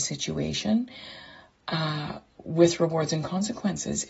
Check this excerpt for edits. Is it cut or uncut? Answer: uncut